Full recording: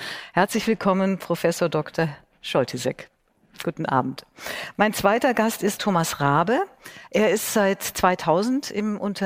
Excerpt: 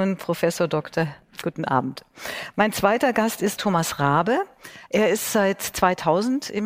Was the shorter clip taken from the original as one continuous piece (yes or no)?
no